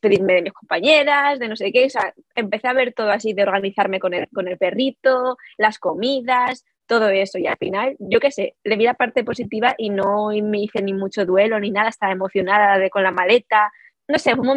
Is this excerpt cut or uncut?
uncut